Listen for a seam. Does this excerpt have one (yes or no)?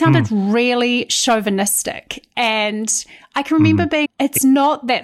yes